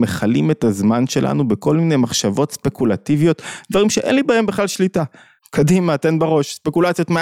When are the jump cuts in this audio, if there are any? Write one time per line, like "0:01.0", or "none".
0:05.4

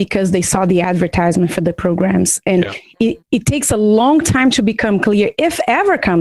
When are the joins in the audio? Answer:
0:03.2

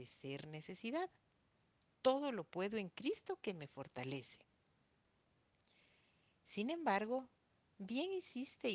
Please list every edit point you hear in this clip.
none

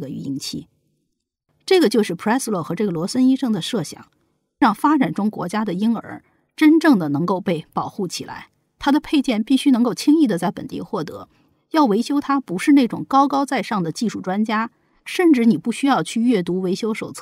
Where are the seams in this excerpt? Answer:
none

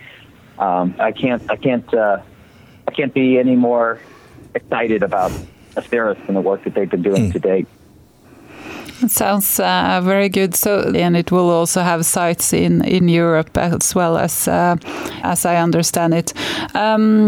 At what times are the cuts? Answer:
0:01.0
0:10.9
0:15.2

